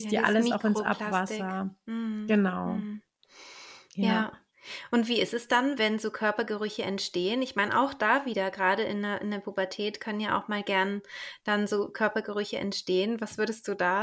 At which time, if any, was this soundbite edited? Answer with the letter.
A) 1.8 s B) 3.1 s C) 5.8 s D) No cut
C